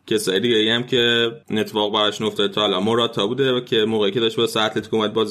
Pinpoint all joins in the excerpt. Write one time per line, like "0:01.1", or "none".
0:01.4